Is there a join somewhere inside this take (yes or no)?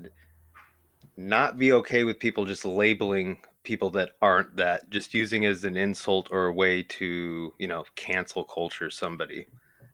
no